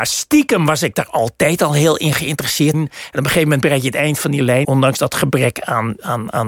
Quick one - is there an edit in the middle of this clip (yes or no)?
yes